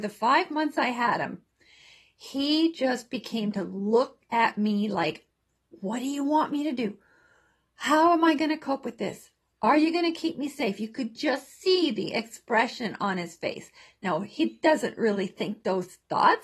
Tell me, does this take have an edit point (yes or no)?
no